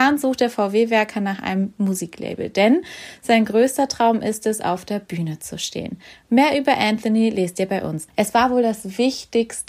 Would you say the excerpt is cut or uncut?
cut